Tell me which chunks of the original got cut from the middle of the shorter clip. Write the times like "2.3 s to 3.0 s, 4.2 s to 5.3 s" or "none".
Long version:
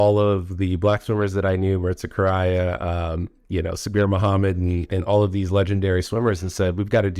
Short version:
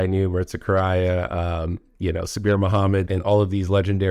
4.5 s to 4.9 s